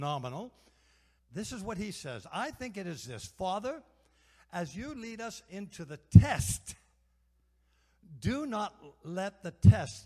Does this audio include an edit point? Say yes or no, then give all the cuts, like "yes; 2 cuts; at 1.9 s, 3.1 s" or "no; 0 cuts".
yes; 1 cut; at 1.2 s